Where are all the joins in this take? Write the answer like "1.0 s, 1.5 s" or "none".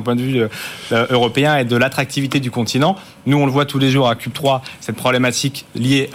none